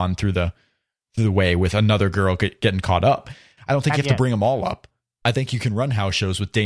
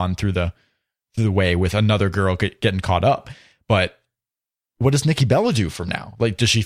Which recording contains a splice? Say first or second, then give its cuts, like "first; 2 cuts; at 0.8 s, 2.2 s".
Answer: first; 1 cut; at 3.6 s